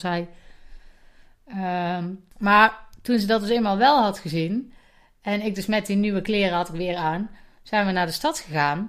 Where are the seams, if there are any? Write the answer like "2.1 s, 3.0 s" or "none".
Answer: 2.3 s